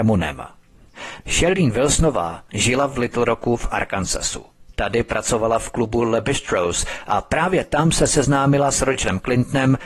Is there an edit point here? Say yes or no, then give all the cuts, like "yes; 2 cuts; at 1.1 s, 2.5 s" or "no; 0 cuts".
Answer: yes; 1 cut; at 1.2 s